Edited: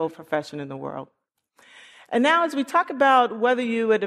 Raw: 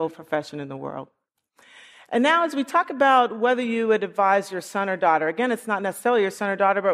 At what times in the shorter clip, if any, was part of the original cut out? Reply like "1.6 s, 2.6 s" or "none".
none